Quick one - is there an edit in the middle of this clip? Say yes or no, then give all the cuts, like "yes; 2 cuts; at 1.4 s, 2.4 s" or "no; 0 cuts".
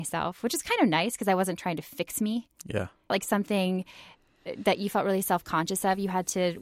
yes; 1 cut; at 3.1 s